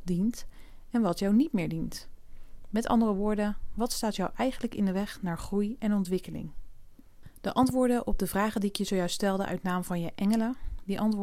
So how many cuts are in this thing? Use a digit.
0